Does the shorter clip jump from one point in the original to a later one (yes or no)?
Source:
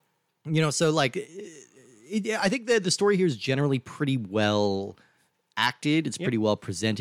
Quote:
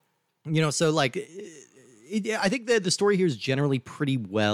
no